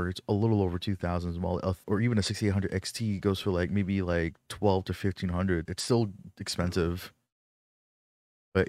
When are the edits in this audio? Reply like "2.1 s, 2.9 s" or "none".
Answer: 1.8 s, 5.7 s